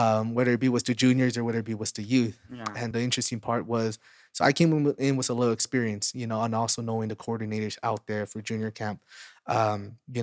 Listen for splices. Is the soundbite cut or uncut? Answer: cut